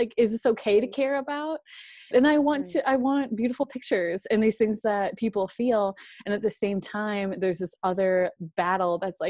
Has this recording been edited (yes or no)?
yes